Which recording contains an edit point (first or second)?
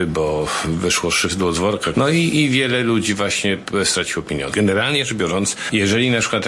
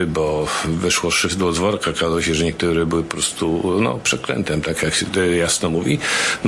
first